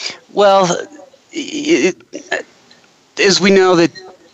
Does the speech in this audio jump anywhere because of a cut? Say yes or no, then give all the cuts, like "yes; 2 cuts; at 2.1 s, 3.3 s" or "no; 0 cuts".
no; 0 cuts